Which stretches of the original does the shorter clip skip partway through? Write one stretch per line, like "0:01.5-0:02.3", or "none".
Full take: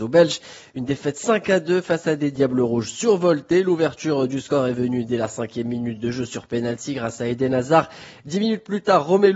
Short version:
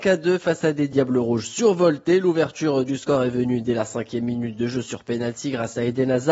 none